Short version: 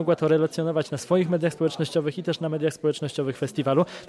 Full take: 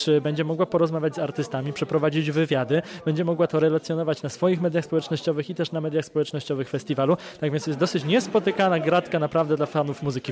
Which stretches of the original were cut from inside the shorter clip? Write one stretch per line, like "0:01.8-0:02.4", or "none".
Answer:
none